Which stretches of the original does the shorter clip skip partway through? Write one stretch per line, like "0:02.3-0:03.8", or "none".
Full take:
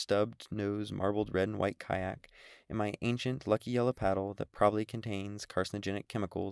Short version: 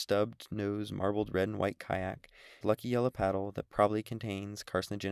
0:02.6-0:03.4